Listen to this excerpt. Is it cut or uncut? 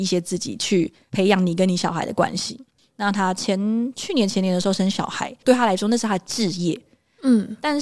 cut